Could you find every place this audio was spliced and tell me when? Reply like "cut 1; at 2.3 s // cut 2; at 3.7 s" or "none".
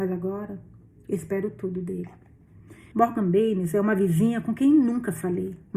cut 1; at 2.9 s